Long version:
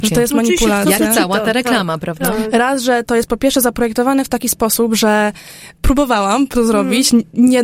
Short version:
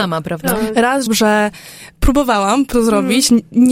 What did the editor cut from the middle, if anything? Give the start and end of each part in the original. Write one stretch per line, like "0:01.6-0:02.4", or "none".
0:02.8-0:04.9

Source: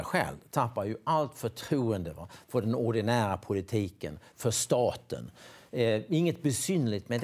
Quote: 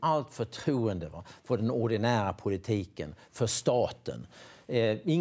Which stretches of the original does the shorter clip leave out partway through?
none

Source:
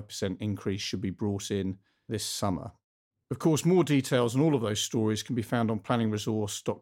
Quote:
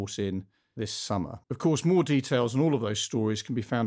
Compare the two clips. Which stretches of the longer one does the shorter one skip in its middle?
0:02.8-0:03.2

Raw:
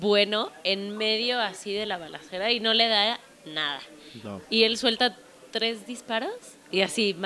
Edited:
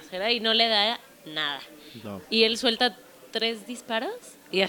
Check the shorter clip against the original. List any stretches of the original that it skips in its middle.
none

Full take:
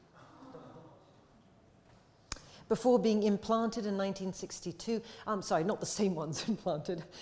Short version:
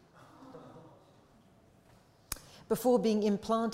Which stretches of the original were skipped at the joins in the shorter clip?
none

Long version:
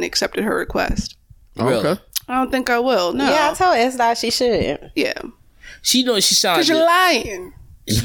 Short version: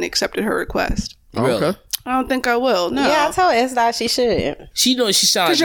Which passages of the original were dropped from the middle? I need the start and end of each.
0:01.3-0:01.5
0:04.9-0:05.8

